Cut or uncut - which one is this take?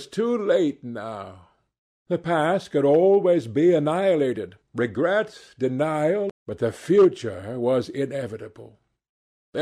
cut